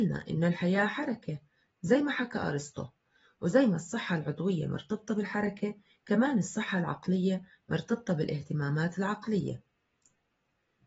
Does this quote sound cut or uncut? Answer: uncut